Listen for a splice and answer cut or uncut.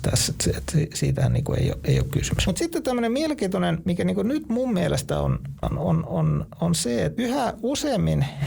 cut